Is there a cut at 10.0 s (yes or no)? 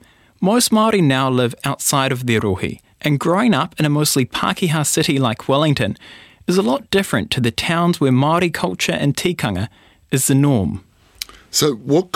no